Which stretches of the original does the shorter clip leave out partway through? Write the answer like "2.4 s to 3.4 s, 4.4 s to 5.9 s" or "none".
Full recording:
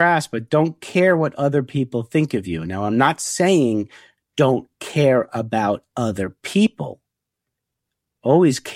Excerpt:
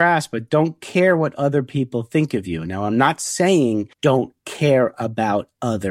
3.9 s to 4.3 s